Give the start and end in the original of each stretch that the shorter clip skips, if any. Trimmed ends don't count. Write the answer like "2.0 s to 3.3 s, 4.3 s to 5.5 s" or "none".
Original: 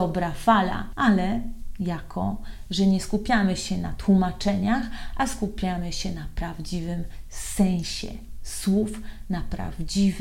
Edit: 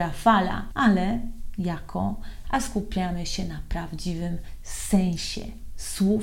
2.7 s to 5.1 s